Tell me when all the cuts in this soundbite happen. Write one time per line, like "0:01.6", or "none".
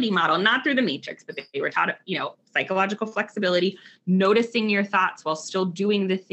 none